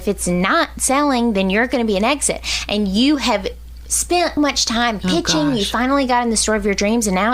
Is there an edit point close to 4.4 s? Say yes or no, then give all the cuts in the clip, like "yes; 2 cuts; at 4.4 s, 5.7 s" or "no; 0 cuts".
yes; 1 cut; at 4.4 s